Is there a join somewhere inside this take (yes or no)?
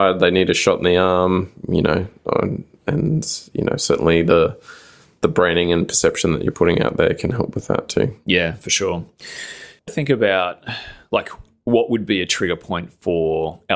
yes